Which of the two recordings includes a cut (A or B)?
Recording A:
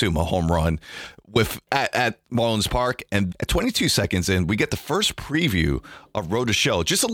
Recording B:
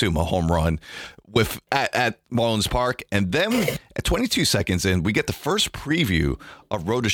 A